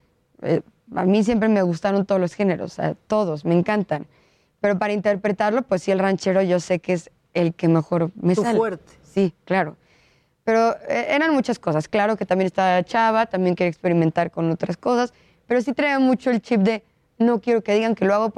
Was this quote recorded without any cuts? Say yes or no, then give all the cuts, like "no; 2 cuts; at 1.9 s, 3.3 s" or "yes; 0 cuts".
yes; 0 cuts